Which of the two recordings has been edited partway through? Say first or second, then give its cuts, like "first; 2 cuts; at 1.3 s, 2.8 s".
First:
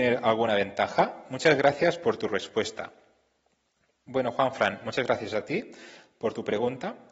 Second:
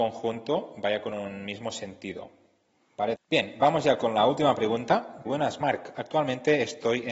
second; 2 cuts; at 3.1 s, 5.3 s